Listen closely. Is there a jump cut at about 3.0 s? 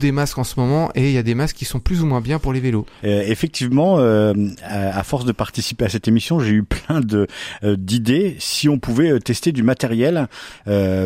yes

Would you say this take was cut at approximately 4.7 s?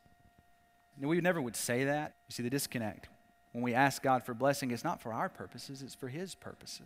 no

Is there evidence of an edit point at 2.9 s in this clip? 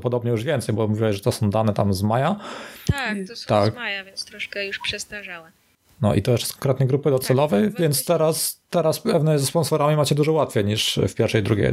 no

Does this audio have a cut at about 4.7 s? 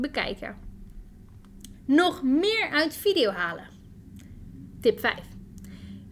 no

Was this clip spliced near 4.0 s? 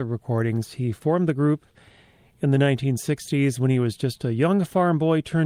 no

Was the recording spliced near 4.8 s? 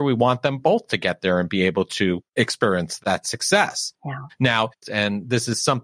yes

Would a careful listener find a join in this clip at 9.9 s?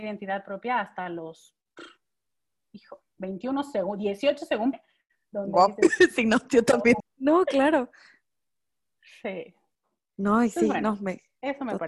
no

